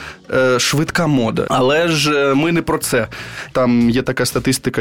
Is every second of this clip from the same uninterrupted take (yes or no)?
no